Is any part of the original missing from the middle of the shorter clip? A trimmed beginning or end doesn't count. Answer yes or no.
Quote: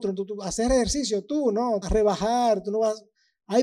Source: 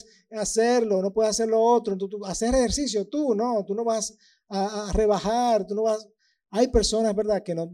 yes